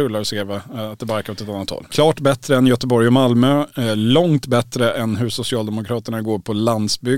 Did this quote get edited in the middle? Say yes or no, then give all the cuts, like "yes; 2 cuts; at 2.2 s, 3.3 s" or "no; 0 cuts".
yes; 1 cut; at 1.9 s